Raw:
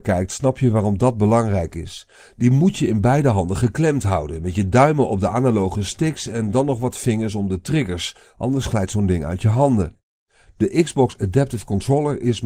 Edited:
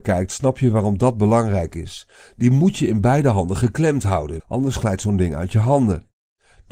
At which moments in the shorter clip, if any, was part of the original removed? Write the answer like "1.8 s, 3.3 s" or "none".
4.4 s

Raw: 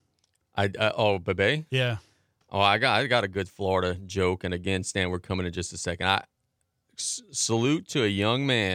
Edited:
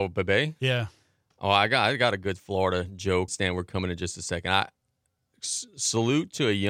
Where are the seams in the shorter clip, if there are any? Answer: 3.3 s

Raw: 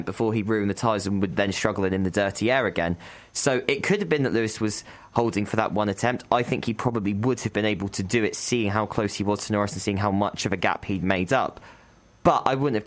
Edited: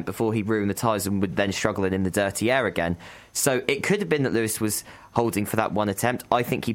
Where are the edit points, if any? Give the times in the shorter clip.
none

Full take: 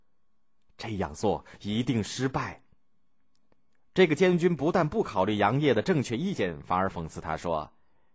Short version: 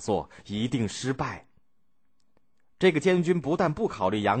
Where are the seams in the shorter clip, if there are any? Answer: none

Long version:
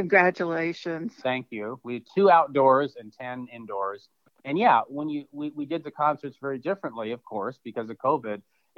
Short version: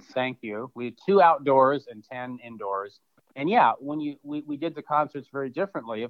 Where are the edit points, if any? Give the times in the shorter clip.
none

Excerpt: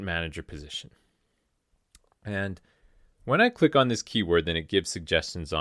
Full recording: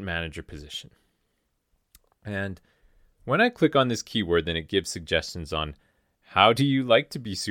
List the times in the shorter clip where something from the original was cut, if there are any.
none

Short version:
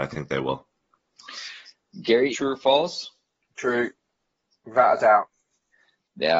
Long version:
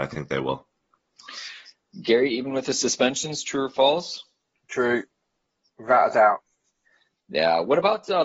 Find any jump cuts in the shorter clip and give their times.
2.3 s

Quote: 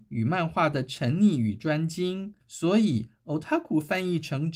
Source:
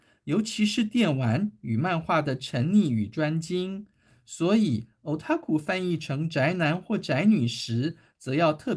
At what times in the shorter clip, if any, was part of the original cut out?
2.4 s

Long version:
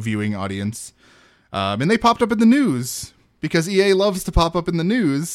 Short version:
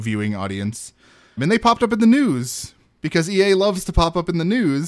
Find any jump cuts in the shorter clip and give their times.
1.4 s

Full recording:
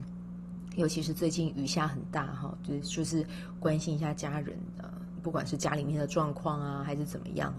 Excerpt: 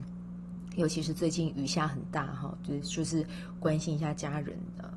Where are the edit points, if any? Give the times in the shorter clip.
none

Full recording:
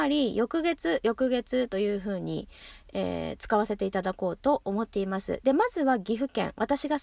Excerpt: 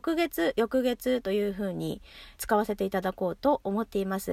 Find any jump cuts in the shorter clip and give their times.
2.4 s

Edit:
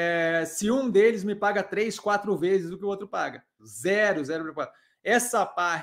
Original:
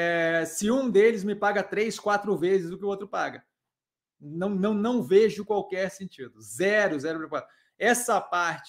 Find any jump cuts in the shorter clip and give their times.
3.6 s

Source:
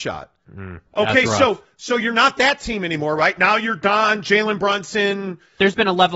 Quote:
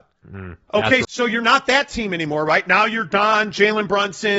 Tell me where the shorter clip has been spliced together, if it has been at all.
1.0 s

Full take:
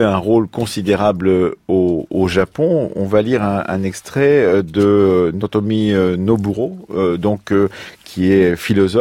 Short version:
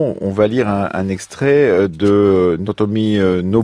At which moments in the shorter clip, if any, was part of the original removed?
none

